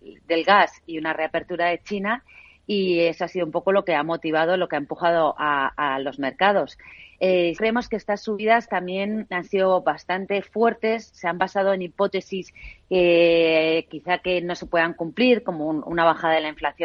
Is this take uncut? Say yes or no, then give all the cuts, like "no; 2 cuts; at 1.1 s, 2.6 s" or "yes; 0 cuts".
no; 1 cut; at 7.6 s